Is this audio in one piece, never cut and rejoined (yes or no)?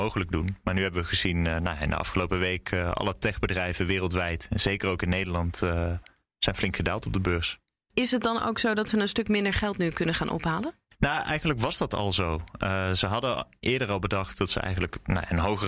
yes